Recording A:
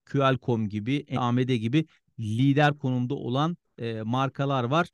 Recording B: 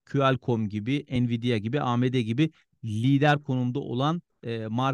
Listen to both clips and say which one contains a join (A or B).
A